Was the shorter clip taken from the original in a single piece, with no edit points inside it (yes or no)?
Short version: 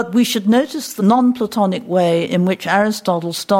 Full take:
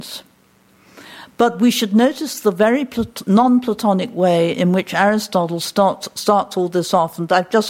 no